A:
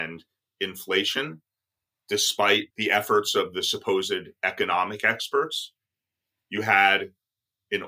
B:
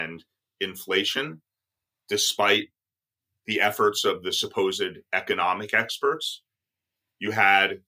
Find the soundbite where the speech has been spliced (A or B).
A